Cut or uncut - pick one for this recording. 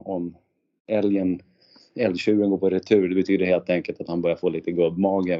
uncut